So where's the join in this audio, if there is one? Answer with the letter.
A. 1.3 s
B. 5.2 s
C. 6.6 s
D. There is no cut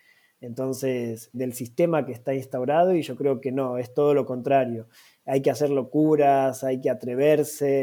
A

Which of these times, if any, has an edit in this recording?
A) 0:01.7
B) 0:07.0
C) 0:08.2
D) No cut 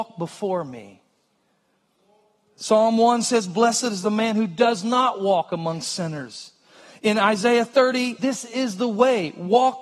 C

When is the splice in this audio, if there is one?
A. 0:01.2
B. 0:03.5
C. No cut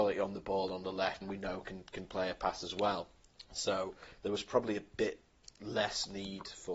A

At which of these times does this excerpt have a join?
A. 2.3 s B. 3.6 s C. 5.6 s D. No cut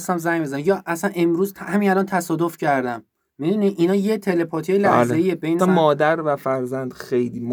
C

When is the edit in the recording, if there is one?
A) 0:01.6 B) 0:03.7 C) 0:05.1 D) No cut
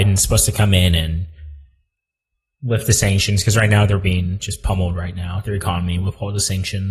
D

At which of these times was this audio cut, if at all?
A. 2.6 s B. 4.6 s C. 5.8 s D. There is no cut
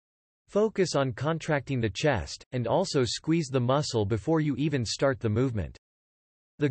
D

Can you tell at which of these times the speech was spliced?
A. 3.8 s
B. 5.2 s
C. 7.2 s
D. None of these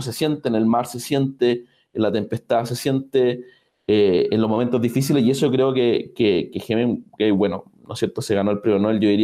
D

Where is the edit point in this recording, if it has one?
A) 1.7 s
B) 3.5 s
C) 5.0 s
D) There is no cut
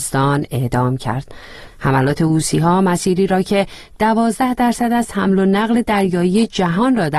A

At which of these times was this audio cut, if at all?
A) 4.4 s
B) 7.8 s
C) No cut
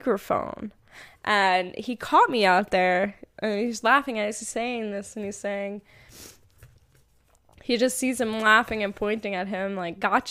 A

